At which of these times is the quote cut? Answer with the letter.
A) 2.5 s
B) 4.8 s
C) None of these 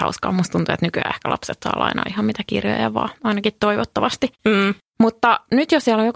B